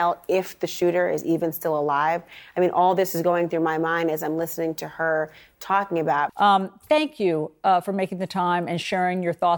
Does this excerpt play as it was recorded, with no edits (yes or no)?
no